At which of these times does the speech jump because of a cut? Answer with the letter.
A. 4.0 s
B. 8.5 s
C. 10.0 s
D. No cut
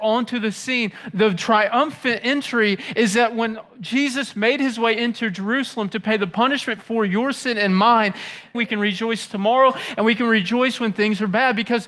B